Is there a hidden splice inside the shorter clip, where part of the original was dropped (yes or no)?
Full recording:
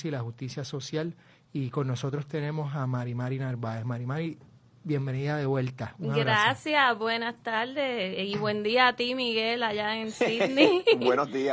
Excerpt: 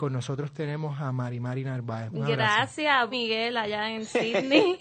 yes